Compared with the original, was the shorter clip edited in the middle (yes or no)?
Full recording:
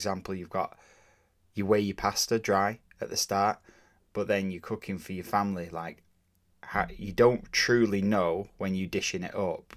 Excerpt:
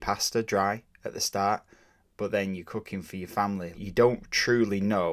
yes